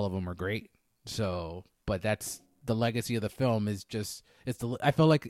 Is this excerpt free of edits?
yes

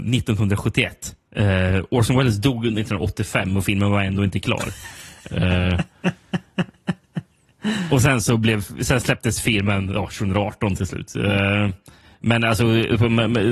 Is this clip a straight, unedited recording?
yes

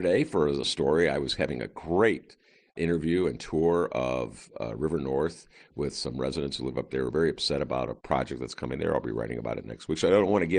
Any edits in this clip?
no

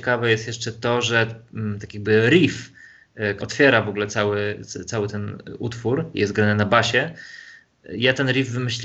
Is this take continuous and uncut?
no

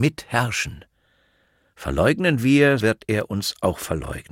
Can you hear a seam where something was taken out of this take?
yes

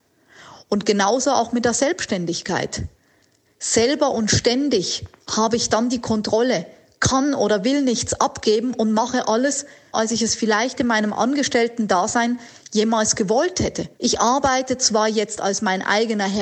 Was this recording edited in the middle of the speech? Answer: yes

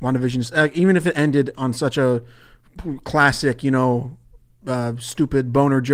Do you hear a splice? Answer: no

